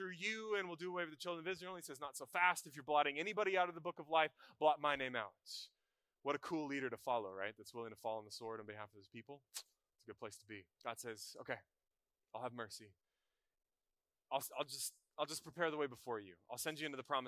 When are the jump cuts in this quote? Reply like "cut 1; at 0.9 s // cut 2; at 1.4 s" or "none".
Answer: cut 1; at 10.7 s